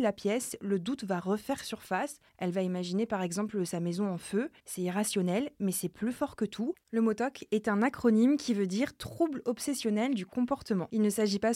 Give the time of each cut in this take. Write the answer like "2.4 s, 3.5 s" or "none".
2.3 s, 6.8 s